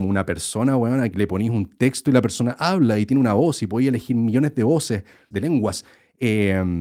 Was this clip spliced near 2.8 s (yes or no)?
no